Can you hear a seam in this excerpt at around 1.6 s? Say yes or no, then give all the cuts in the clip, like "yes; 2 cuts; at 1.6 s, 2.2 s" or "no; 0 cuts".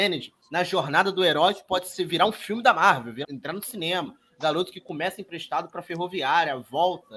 no; 1 cut; at 3.2 s